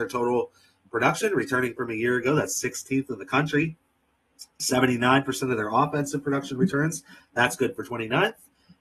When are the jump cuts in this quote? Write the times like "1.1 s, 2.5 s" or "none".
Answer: none